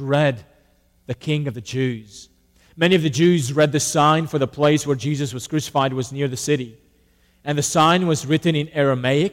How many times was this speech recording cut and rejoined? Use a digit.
1